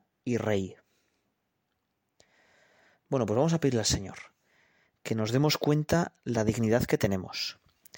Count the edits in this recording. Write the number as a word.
zero